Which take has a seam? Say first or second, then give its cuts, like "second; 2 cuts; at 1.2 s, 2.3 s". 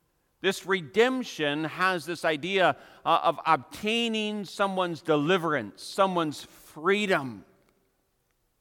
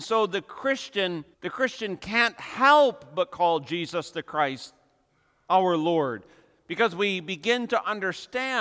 second; 1 cut; at 1.3 s